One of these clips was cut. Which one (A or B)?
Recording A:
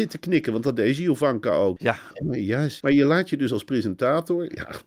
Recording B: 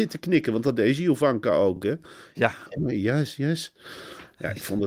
A